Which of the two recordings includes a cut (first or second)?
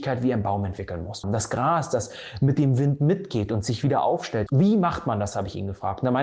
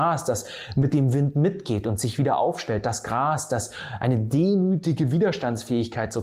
first